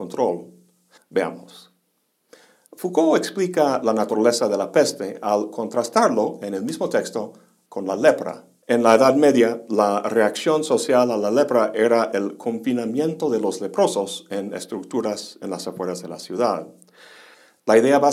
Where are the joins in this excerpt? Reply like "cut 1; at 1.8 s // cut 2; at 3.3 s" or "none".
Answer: cut 1; at 1.0 s // cut 2; at 8.6 s